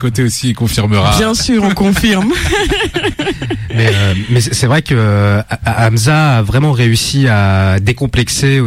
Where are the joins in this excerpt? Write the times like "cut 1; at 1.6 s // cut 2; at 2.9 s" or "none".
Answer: none